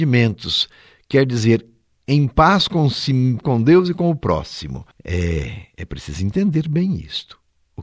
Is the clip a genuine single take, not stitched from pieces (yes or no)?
no